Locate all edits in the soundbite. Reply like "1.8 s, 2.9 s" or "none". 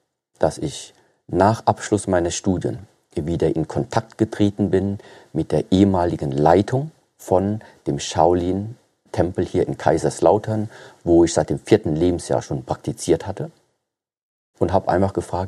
none